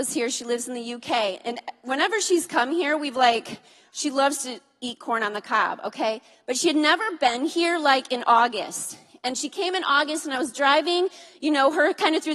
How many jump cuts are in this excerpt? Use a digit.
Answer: 0